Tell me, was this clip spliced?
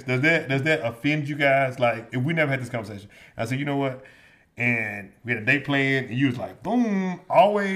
yes; 1 cut; at 2.1 s

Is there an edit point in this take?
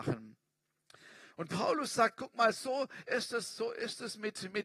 no; 0 cuts

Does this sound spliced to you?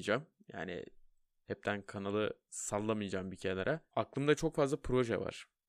no; 0 cuts

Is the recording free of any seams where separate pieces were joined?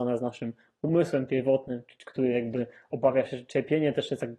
yes; 0 cuts

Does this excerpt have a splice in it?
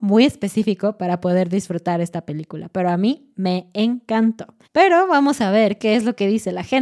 yes; 1 cut; at 4.6 s

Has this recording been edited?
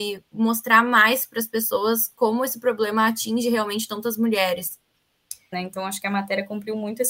yes; 1 cut; at 5.5 s

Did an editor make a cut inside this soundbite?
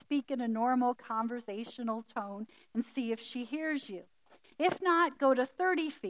no; 0 cuts

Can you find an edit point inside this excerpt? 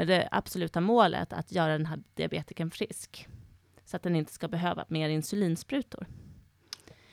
no; 0 cuts

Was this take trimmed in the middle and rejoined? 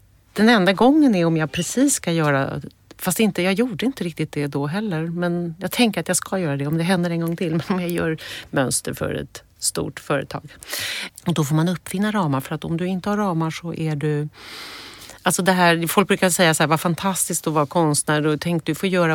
yes; 1 cut; at 11.1 s

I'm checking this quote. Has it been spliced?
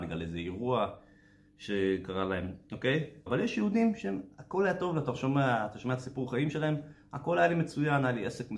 yes; 1 cut; at 3.3 s

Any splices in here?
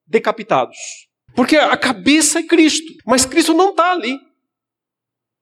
yes; 2 cuts; at 1.3 s, 3.0 s

